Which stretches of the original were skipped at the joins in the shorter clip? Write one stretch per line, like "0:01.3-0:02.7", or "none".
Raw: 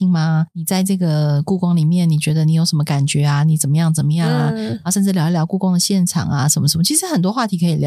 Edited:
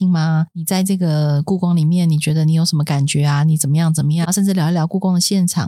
0:04.2-0:04.8